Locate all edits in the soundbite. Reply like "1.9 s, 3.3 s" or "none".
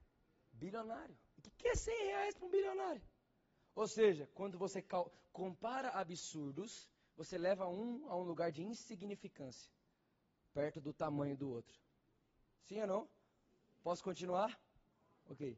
none